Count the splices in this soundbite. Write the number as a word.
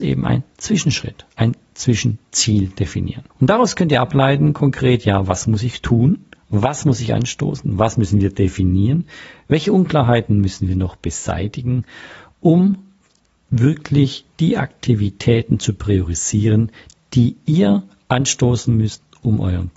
one